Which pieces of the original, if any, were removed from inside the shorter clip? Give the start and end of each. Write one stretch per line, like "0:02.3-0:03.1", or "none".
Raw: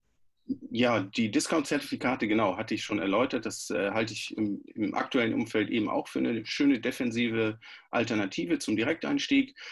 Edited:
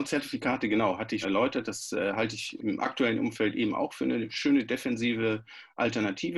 0:02.8-0:03.0
0:04.4-0:04.7